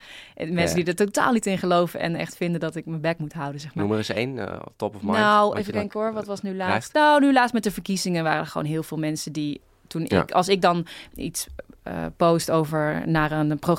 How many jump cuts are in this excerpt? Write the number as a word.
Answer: zero